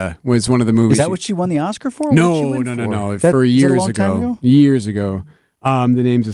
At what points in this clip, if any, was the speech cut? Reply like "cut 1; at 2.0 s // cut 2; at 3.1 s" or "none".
none